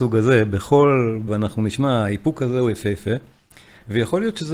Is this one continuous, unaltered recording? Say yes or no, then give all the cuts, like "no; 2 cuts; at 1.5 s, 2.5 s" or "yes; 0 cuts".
no; 1 cut; at 1.3 s